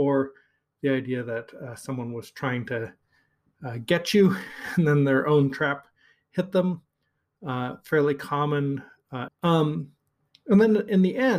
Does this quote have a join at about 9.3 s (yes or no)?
yes